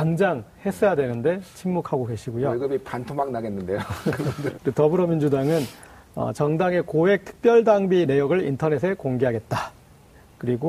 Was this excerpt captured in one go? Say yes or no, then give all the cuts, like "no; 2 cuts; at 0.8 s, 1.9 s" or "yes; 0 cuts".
yes; 0 cuts